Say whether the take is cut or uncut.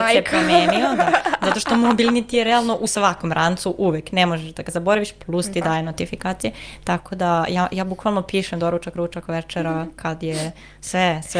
uncut